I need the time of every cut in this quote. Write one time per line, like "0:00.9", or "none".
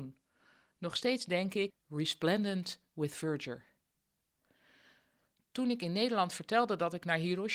0:01.7